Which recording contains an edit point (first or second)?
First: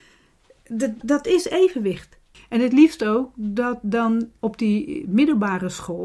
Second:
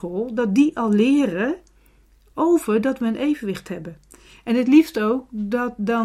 first